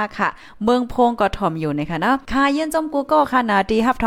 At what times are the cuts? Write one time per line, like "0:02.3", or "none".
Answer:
0:02.3